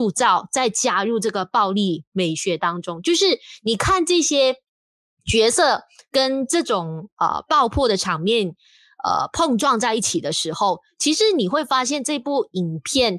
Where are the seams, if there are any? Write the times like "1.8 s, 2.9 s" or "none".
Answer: none